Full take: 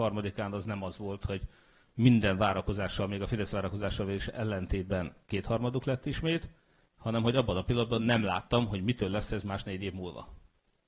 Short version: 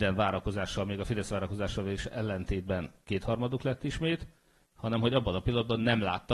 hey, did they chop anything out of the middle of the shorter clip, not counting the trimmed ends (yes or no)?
no